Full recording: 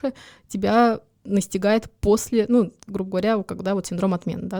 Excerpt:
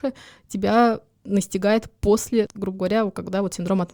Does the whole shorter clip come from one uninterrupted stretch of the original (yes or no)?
no